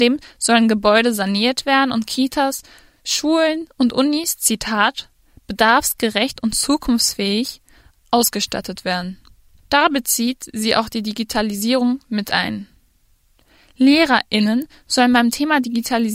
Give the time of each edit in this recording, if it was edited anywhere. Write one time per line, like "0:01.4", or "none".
0:09.6